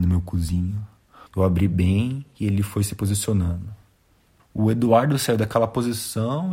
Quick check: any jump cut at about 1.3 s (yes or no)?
yes